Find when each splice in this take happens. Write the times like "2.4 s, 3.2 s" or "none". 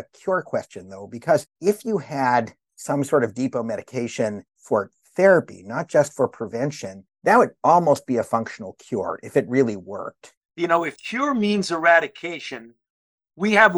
10.4 s